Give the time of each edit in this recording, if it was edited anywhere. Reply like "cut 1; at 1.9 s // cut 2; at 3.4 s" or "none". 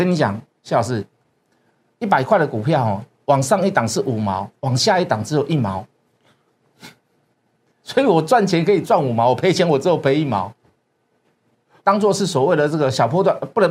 cut 1; at 11.8 s